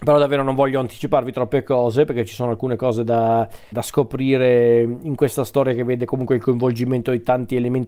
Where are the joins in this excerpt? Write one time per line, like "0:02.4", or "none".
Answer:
0:03.7